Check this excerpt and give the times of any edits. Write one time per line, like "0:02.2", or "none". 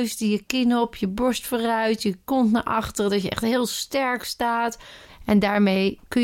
0:05.1